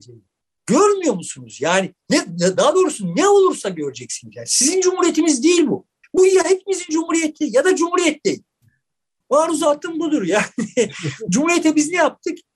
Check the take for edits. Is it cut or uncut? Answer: uncut